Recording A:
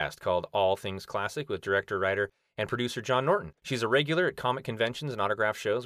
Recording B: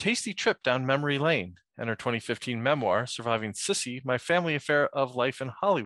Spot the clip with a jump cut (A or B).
A